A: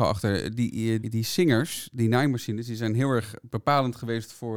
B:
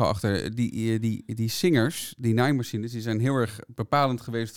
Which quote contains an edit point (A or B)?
A